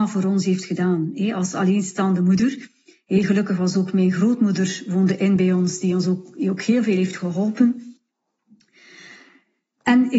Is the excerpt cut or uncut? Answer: uncut